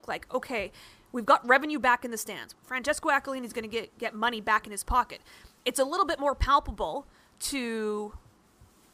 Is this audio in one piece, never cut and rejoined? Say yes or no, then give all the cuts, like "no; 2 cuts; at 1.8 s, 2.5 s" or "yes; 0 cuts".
no; 1 cut; at 2.5 s